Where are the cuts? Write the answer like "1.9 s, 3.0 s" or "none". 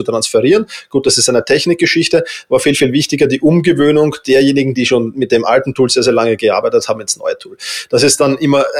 none